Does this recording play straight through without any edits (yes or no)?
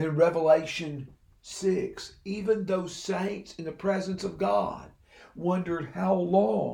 yes